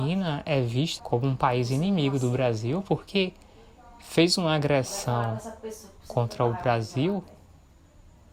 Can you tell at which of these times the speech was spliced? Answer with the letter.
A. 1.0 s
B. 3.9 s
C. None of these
A